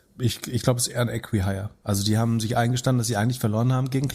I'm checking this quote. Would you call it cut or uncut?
uncut